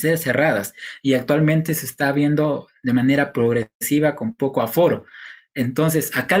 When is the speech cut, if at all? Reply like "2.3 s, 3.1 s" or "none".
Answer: none